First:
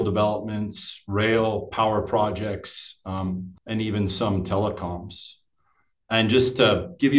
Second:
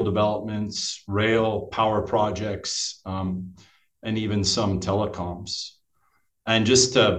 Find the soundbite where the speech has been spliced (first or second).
first